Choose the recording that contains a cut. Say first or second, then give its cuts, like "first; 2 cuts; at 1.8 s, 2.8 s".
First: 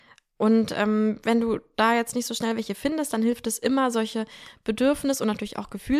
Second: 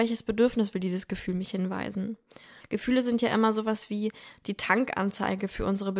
second; 1 cut; at 2.6 s